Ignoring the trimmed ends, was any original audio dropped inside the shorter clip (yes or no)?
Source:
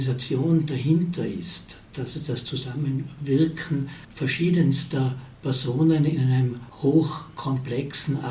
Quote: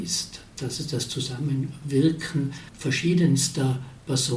no